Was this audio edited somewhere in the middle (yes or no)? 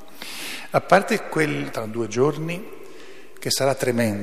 yes